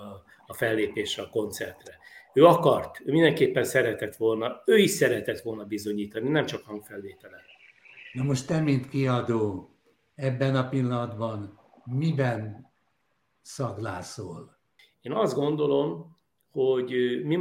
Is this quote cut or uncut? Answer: uncut